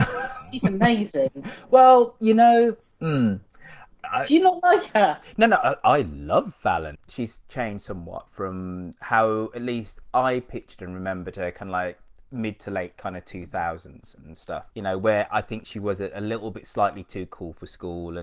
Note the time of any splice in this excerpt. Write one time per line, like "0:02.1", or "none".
0:07.0
0:14.7